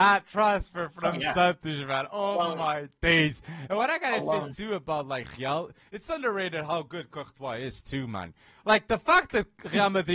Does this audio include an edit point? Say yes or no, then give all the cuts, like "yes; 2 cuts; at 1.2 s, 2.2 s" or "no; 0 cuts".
no; 0 cuts